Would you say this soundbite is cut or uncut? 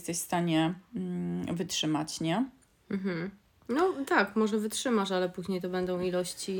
uncut